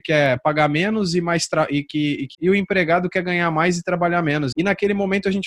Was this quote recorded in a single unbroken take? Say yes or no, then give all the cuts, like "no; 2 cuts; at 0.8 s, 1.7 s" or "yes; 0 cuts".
no; 2 cuts; at 2.3 s, 4.5 s